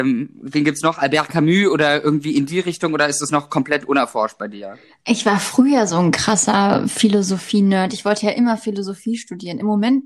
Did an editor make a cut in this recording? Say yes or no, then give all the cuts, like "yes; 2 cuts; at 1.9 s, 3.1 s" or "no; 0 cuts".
no; 0 cuts